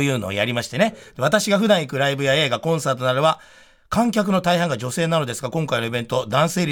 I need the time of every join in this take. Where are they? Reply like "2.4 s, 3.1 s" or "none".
none